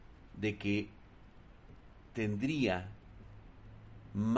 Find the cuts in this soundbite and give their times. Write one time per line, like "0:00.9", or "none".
0:02.1